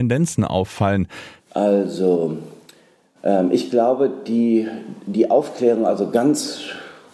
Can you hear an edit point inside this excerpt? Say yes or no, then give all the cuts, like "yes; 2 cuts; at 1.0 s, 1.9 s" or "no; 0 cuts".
yes; 1 cut; at 1.4 s